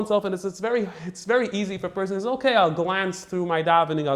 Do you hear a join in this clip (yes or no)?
no